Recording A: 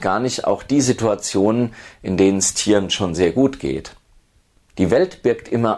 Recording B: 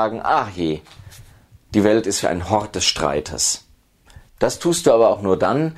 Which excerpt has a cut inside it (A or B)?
B